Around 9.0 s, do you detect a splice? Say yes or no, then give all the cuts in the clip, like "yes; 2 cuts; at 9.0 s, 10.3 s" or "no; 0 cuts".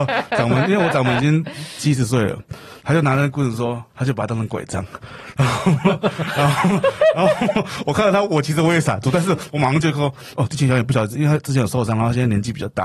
no; 1 cut; at 3.9 s